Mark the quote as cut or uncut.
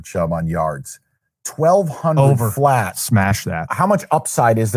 cut